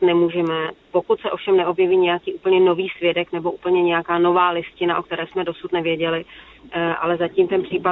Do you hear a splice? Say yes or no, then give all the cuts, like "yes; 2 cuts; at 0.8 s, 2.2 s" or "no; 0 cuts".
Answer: no; 0 cuts